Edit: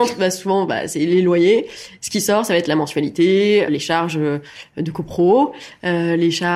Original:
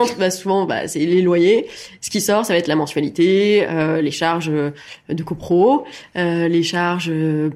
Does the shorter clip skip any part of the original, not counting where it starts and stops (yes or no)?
yes